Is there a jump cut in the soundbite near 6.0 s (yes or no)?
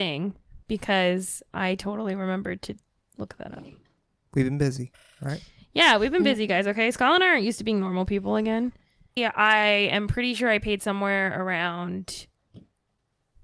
no